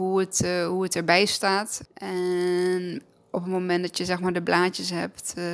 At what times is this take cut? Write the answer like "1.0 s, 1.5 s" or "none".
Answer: 1.8 s